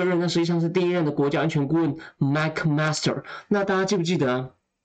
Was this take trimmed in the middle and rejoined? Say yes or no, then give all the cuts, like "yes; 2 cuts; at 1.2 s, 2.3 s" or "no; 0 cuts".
no; 0 cuts